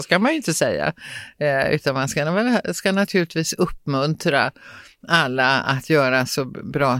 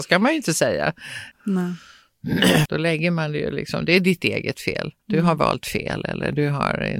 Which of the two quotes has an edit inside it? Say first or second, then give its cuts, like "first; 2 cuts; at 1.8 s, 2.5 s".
second; 3 cuts; at 1.3 s, 2.7 s, 5.0 s